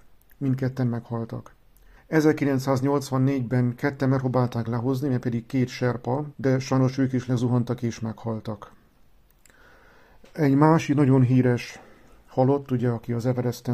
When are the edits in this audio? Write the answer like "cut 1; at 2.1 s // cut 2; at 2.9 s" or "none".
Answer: cut 1; at 2.0 s // cut 2; at 6.3 s